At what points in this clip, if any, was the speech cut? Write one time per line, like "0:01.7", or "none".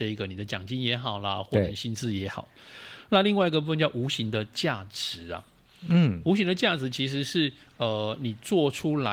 none